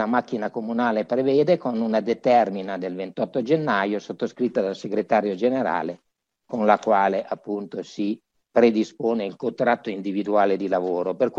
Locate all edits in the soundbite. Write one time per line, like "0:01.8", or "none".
0:08.5